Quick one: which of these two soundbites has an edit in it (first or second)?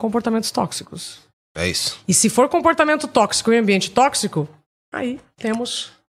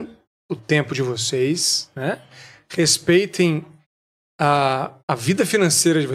second